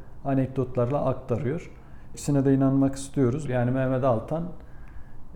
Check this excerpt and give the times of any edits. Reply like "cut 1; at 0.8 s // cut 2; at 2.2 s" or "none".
cut 1; at 2.1 s // cut 2; at 3.4 s